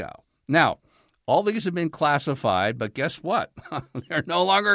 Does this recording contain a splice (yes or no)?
no